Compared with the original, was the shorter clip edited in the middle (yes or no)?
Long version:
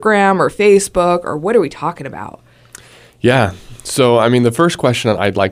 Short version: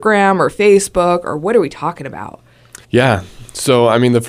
yes